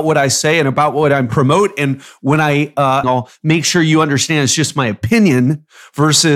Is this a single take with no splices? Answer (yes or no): no